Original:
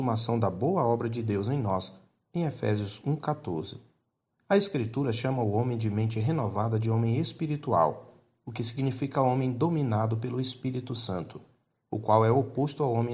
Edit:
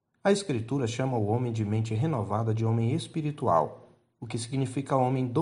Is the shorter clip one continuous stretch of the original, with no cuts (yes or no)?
yes